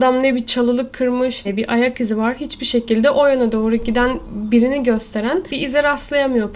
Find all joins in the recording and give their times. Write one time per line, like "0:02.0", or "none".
0:01.4